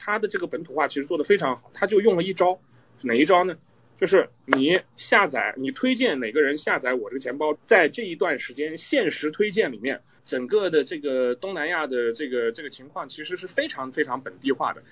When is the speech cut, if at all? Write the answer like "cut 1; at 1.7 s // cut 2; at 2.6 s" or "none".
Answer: cut 1; at 7.5 s // cut 2; at 10.2 s